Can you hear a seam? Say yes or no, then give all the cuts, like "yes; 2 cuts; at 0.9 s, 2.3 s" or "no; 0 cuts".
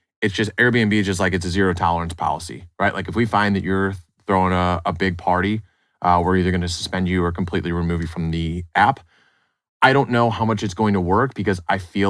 no; 0 cuts